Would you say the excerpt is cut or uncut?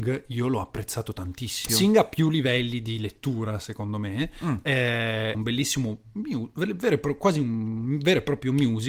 cut